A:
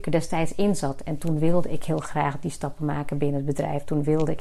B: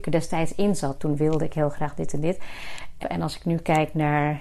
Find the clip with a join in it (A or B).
B